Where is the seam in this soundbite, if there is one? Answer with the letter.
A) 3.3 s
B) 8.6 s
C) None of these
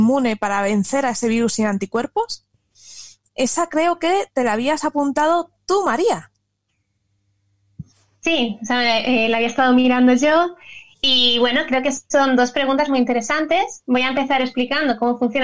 C